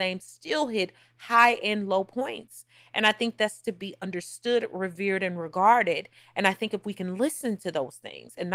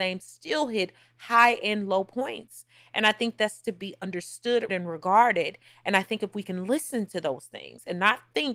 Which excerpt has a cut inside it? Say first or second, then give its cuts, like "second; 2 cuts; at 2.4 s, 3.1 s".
second; 1 cut; at 4.7 s